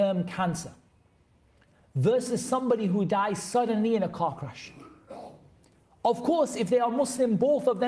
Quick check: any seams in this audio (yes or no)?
no